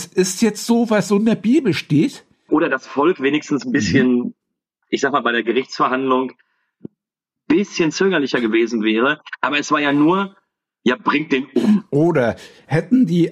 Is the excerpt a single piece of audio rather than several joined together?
no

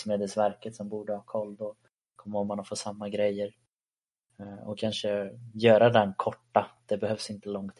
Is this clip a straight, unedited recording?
yes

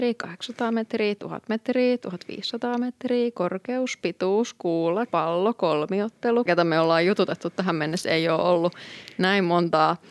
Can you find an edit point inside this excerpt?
yes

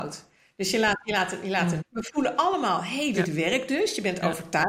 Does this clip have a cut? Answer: yes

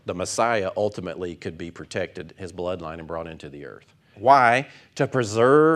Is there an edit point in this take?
yes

